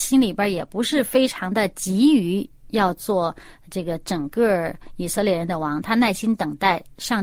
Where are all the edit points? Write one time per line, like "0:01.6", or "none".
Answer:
none